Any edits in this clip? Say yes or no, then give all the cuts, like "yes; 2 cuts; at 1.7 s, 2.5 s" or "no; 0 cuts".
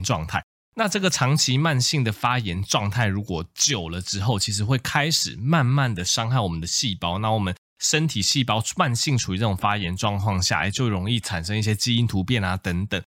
no; 0 cuts